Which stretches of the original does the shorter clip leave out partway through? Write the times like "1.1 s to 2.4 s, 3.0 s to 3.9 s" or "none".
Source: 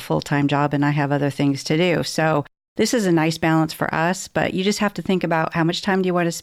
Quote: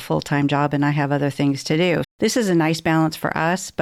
2.0 s to 2.6 s

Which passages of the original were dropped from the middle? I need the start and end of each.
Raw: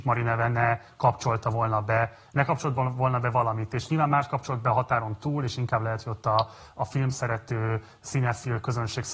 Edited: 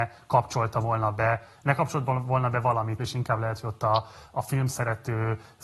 3.7 s to 5.4 s

